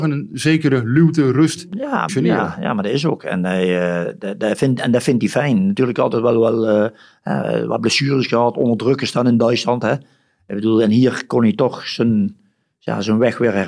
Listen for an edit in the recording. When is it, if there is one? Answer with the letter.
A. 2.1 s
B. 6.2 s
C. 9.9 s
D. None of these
A